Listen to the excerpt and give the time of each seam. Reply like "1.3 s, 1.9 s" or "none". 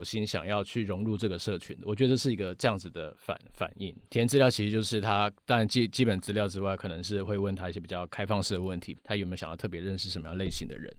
4.1 s, 9.0 s